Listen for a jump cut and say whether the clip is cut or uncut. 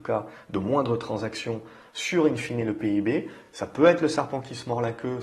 uncut